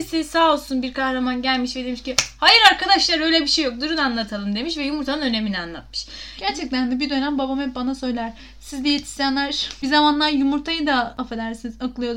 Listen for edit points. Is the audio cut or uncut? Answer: uncut